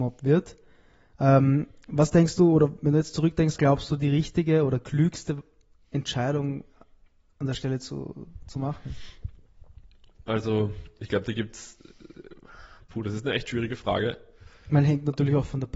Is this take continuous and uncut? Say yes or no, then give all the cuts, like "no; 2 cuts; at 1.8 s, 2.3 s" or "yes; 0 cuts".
no; 1 cut; at 3.6 s